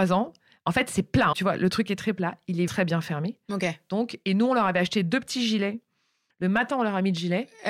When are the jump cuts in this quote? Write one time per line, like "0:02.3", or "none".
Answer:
0:01.3
0:02.7
0:06.3